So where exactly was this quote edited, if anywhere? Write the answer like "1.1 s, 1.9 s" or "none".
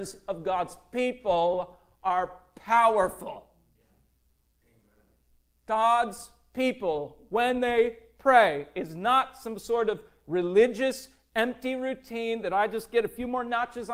none

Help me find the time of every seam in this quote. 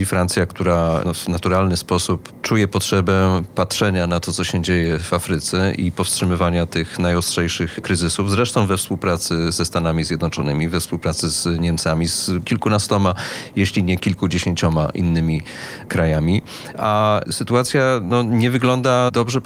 16.7 s

